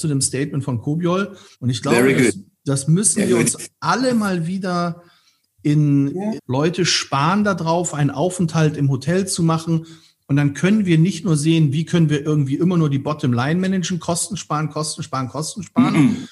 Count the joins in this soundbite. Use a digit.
2